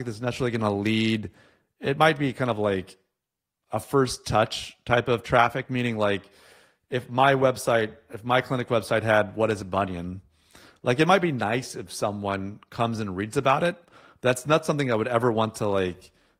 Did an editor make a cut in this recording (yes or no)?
no